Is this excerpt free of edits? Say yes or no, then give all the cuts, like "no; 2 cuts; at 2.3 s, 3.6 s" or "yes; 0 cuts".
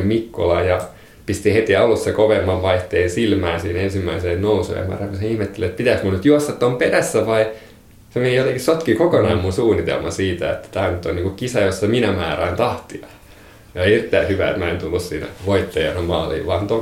yes; 0 cuts